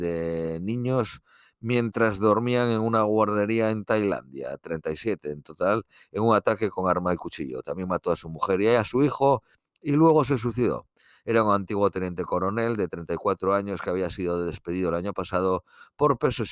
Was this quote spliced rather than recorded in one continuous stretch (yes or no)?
no